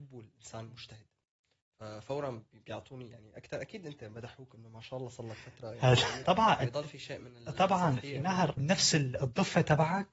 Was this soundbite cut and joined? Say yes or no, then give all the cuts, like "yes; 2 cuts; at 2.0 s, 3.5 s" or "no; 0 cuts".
yes; 2 cuts; at 6.2 s, 8.6 s